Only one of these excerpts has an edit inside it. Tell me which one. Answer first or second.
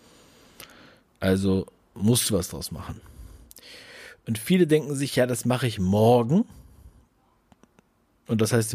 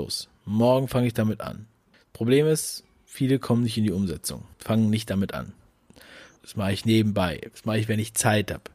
second